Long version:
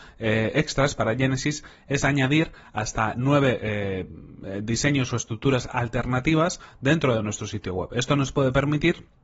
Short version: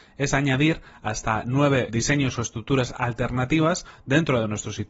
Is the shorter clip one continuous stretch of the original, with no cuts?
no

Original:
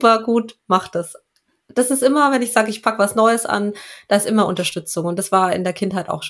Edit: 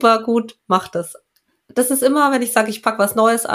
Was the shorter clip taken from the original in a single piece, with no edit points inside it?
yes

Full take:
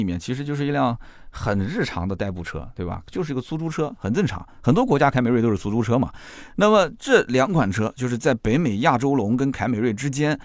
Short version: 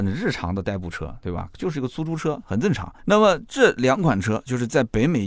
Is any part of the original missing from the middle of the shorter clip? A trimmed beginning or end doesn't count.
yes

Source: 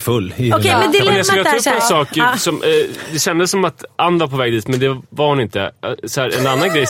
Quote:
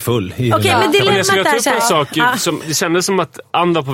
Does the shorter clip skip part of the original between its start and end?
yes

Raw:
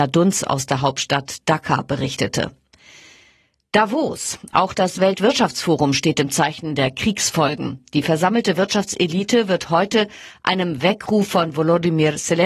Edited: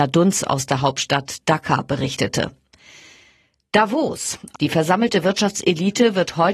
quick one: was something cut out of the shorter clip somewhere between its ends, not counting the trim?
yes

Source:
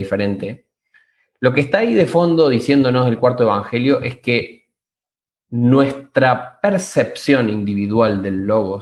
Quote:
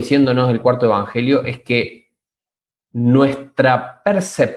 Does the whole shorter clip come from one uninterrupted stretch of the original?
yes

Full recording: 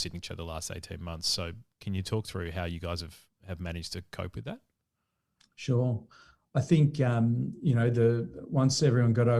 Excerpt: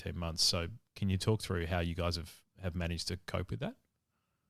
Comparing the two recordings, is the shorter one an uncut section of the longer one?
yes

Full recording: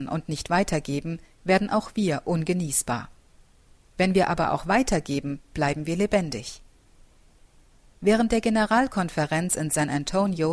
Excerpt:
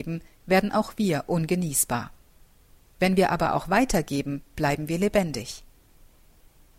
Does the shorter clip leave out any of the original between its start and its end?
no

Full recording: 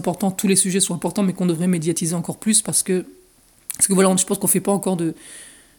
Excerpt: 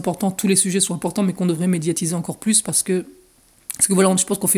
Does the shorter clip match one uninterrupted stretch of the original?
yes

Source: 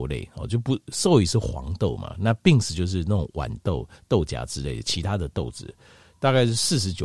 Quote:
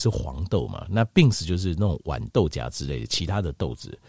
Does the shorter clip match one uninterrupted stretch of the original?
no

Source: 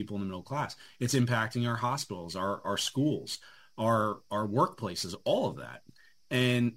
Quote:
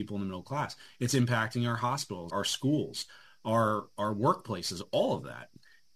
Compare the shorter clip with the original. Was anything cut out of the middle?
yes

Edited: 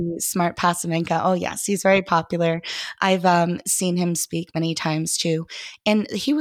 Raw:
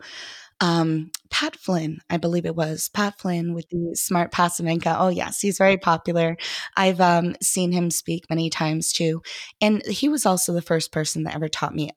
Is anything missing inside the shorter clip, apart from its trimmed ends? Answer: no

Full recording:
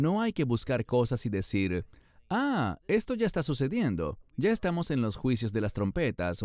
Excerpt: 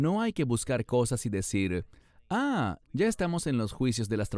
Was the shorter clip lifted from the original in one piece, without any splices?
no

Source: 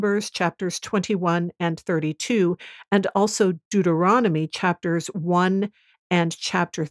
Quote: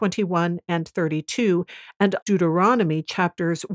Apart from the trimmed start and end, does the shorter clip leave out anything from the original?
yes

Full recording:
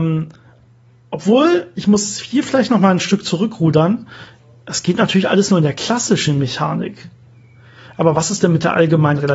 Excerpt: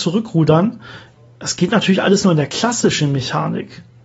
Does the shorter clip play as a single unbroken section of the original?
yes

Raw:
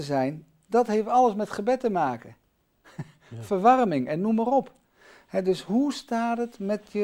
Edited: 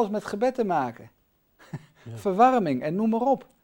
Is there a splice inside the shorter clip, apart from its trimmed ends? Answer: no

